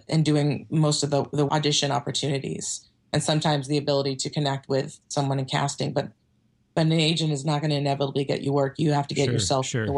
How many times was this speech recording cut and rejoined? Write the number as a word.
one